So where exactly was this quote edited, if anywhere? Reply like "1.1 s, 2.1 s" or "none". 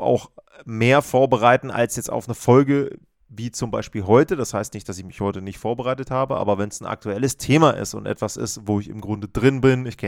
none